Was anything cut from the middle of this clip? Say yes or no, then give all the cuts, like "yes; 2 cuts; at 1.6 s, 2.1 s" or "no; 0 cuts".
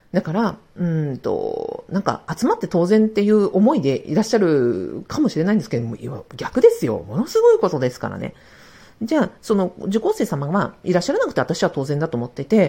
no; 0 cuts